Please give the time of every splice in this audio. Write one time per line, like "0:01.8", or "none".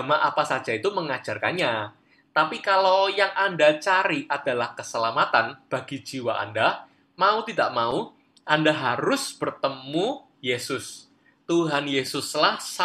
none